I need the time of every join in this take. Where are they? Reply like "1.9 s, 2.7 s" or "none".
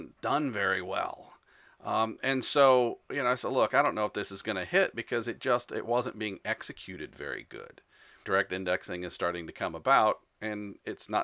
8.2 s